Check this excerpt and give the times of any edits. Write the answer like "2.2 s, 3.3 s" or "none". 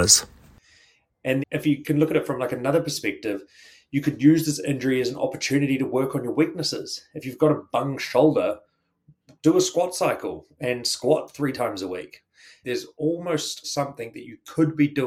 1.4 s, 12.6 s, 13.6 s